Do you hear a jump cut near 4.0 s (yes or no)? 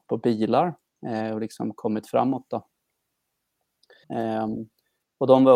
yes